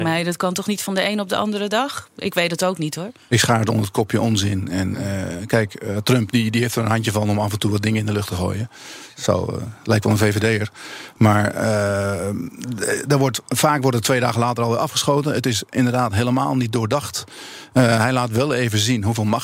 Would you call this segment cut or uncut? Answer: uncut